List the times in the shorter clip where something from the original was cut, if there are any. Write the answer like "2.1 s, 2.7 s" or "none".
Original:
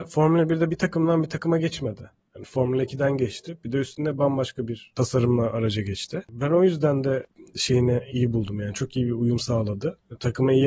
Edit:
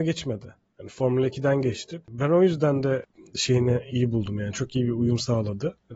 2.0 s

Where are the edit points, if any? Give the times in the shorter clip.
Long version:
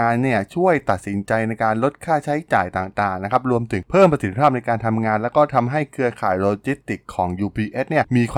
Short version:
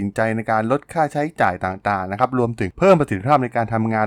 none

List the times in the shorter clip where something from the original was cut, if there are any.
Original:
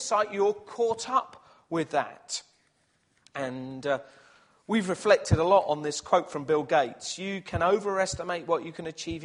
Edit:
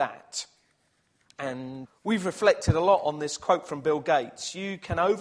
1.9 s

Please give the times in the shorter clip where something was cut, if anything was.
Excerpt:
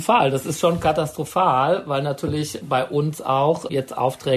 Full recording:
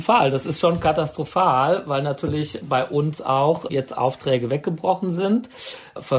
none

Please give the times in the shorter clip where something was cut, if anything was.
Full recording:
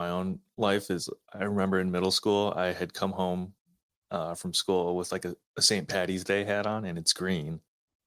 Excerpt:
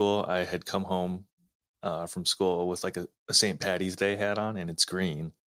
none

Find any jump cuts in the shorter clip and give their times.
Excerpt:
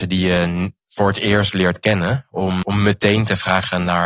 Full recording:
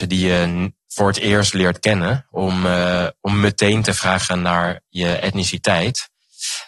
2.6 s

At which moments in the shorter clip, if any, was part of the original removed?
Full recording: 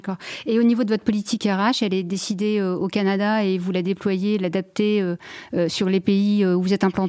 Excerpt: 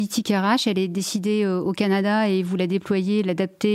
none

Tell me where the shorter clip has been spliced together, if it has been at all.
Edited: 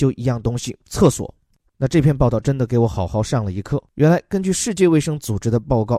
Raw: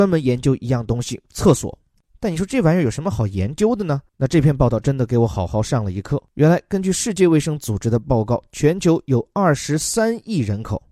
1.7 s

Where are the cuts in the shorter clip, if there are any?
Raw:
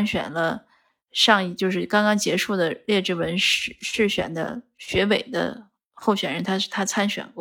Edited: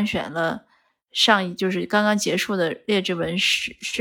none

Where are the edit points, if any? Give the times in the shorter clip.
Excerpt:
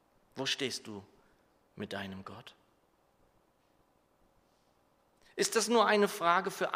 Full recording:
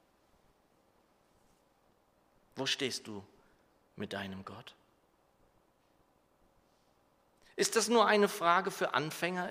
none

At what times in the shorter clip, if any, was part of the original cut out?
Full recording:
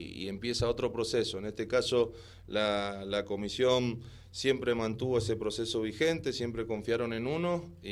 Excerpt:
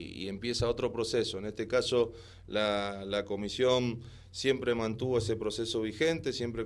none

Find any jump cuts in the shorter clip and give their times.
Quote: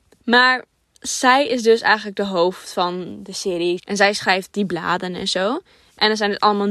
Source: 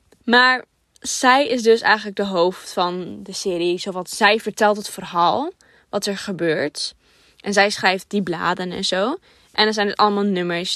3.8 s

